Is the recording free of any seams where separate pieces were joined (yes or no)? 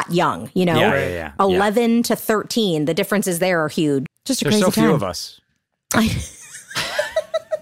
no